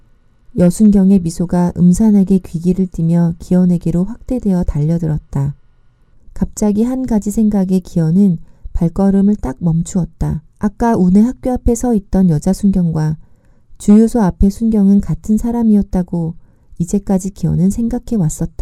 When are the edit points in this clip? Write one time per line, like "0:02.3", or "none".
0:06.1
0:10.5